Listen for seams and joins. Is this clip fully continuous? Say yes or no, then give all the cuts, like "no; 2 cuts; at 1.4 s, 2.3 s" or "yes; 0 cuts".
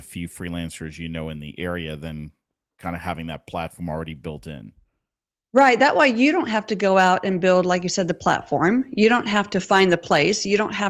yes; 0 cuts